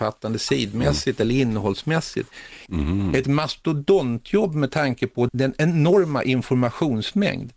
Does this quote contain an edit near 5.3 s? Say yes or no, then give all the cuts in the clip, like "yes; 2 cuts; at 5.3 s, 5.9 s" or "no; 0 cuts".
yes; 2 cuts; at 2.7 s, 5.3 s